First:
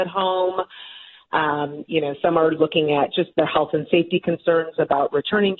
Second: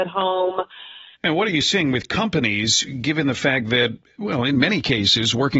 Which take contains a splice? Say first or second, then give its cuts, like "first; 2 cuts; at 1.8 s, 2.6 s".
second; 1 cut; at 1.1 s